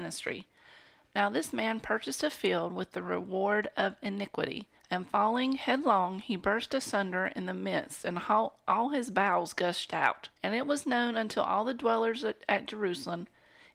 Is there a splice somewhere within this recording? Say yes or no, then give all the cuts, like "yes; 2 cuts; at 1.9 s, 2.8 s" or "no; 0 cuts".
yes; 2 cuts; at 4.8 s, 10.4 s